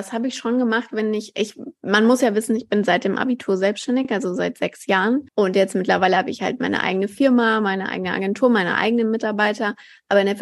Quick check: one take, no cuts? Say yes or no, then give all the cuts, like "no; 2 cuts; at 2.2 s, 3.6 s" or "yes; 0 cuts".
yes; 0 cuts